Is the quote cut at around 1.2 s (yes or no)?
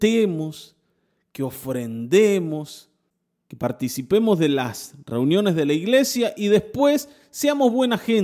no